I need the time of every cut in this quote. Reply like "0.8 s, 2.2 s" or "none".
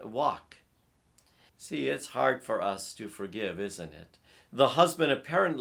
1.5 s, 4.4 s